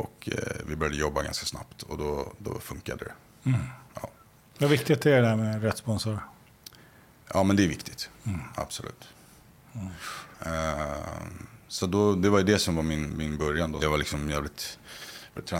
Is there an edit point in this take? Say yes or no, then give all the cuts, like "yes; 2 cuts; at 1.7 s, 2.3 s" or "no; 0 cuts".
yes; 2 cuts; at 10.3 s, 13.8 s